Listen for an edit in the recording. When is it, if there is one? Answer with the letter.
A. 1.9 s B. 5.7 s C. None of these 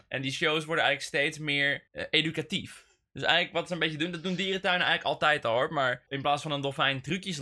A